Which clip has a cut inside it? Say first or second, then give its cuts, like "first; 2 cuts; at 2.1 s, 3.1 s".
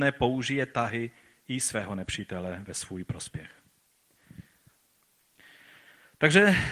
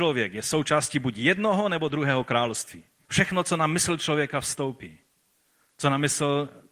second; 1 cut; at 3.0 s